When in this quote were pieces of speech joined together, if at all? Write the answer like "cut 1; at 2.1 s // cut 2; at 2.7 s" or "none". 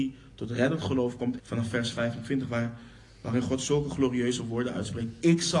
cut 1; at 1.4 s